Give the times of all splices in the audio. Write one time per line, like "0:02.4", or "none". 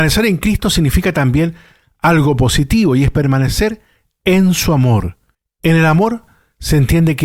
none